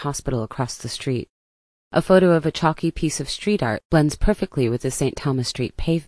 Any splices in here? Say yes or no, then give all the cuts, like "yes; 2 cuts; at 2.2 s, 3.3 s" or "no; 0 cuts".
no; 0 cuts